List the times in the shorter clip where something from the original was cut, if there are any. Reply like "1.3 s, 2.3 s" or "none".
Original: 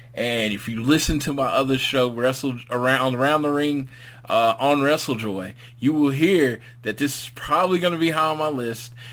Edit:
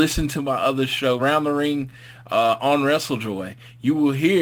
1.2 s